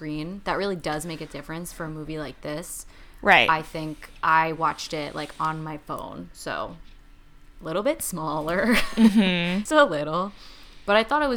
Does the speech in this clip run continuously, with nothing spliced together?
no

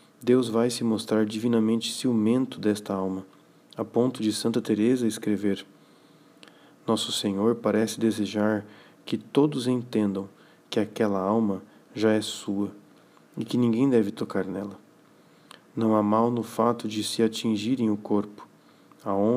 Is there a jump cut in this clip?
no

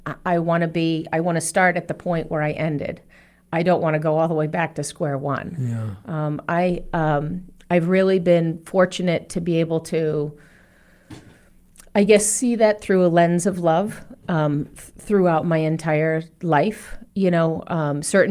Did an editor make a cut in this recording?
no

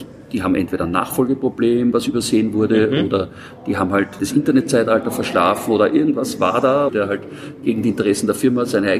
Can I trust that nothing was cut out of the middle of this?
no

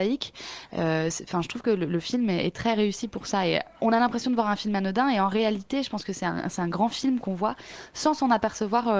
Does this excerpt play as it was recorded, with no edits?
yes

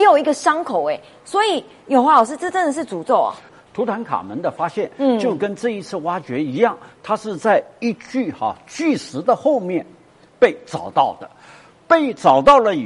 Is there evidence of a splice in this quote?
no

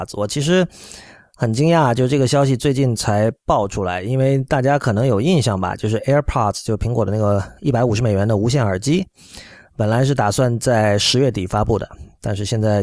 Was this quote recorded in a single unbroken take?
yes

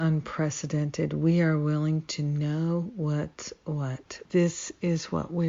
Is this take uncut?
no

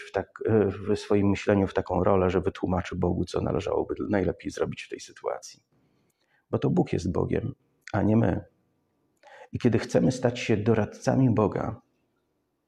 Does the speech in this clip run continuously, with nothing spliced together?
yes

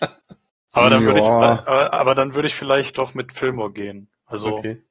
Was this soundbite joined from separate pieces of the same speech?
no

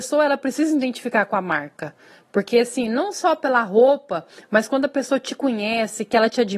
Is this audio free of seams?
yes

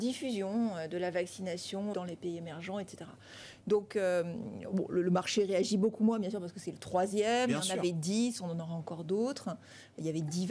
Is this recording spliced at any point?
yes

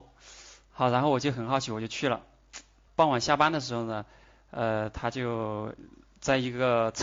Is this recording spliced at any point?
no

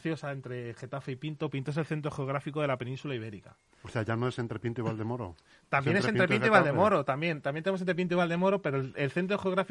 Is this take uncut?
yes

